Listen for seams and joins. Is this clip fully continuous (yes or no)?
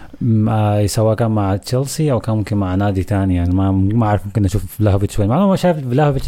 yes